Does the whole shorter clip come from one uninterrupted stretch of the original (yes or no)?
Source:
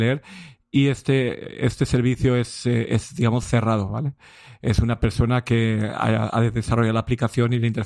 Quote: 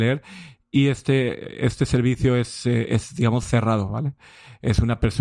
yes